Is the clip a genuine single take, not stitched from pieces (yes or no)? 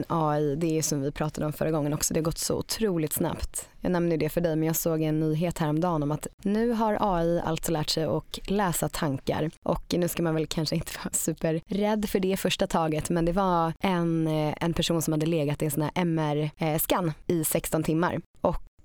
yes